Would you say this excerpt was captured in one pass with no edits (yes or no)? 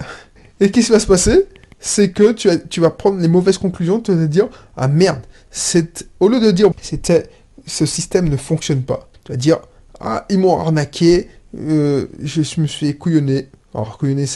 no